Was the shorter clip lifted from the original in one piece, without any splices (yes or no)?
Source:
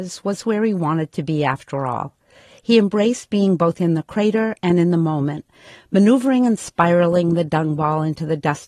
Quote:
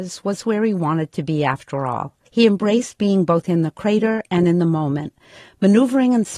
no